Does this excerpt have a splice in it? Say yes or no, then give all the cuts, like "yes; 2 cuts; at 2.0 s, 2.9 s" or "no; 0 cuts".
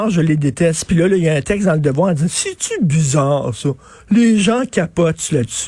no; 0 cuts